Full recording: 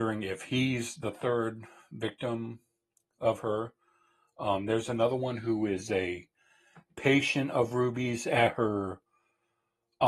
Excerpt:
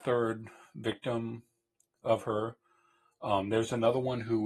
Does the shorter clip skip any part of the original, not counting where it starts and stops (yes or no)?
no